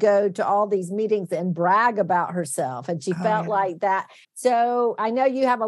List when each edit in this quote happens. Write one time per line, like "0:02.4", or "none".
0:04.2